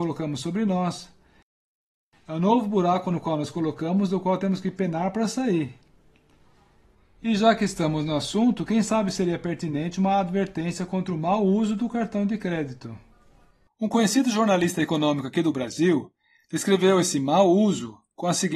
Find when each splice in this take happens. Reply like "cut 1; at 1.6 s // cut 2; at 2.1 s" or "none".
none